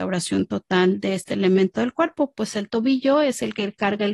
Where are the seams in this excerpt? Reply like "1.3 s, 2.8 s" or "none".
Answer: none